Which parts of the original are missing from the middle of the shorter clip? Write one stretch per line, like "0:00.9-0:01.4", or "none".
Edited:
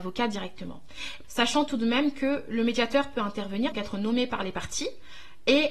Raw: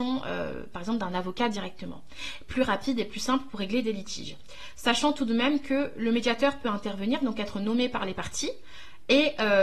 0:02.5-0:04.7
0:07.2-0:07.3